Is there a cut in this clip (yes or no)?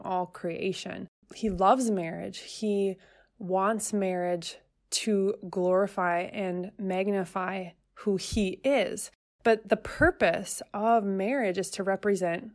no